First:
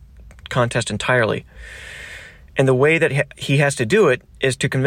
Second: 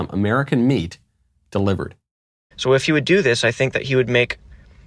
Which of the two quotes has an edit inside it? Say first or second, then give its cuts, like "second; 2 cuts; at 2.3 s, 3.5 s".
second; 1 cut; at 2.5 s